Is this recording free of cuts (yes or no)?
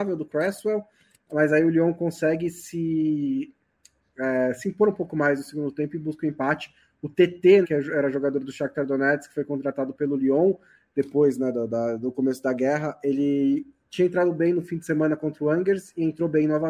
no